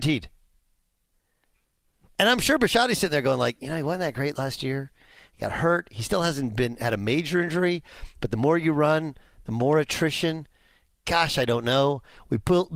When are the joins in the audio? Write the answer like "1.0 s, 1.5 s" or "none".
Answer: none

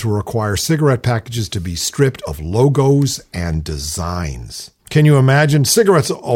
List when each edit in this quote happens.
4.8 s

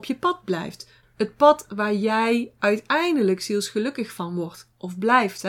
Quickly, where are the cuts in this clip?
1.0 s

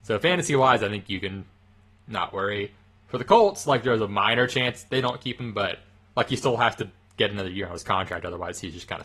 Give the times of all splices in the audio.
none

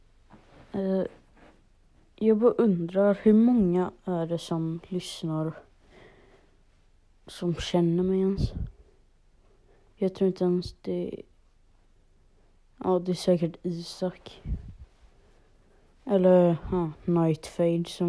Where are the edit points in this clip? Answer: none

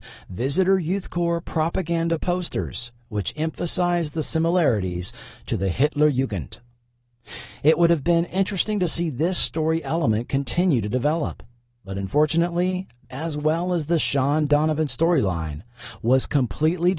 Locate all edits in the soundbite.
13.0 s

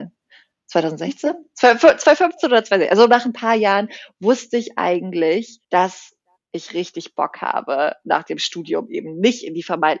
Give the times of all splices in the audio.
5.6 s

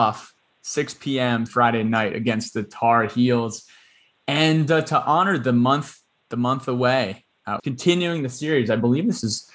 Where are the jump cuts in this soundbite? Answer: 1.5 s, 7.6 s

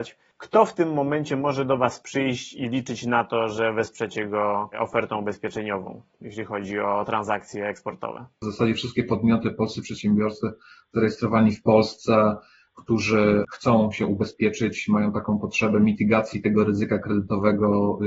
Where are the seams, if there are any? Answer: 8.4 s

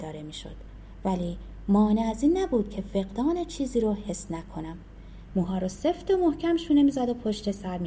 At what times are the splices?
5.3 s

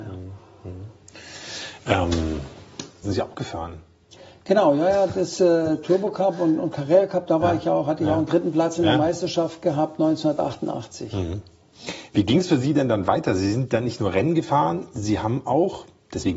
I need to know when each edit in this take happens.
3.0 s

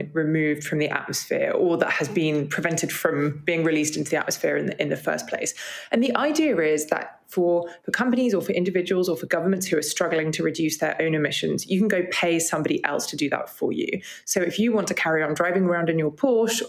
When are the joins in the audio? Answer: none

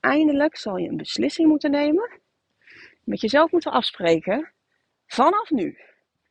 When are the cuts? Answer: none

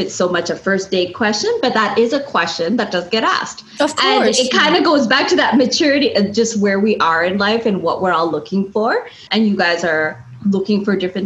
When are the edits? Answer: 9.3 s

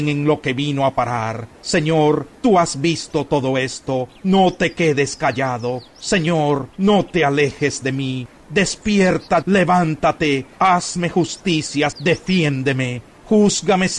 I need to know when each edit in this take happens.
9.4 s, 11.9 s

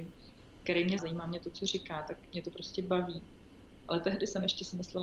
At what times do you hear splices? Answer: 1.0 s, 3.8 s

